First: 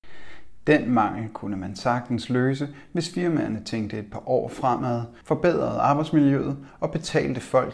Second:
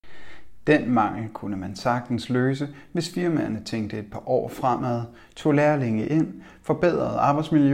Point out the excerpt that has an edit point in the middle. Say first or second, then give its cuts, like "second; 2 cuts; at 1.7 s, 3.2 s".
first; 1 cut; at 5.2 s